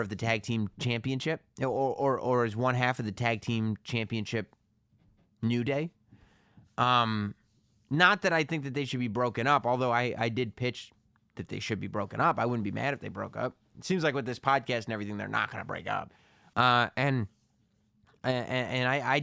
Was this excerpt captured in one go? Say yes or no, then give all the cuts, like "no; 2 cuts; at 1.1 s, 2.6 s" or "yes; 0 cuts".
no; 1 cut; at 16.5 s